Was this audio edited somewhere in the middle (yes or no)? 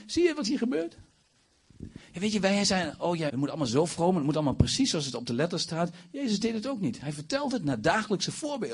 yes